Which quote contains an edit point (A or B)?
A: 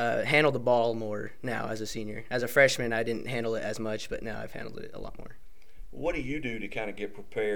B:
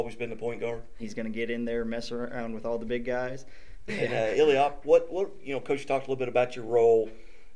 B